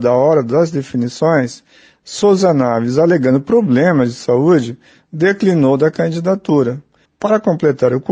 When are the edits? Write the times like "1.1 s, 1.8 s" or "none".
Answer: 7.1 s